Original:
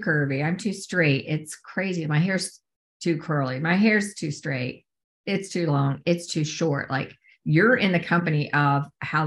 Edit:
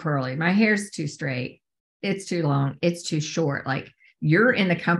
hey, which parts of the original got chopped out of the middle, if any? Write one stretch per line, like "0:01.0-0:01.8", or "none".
none